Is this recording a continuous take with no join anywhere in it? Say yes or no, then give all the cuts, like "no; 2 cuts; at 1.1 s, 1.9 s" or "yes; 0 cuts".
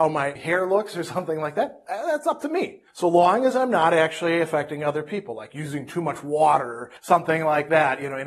yes; 0 cuts